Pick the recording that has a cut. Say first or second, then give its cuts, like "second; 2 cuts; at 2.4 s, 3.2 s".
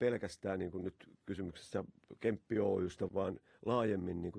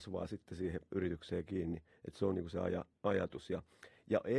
first; 1 cut; at 3.1 s